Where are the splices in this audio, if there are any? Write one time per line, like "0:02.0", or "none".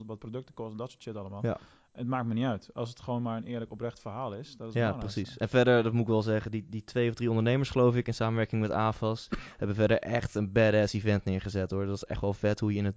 none